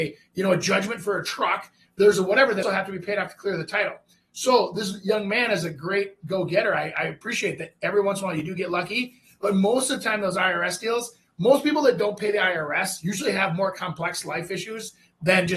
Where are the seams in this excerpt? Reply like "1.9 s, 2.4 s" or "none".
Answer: 2.6 s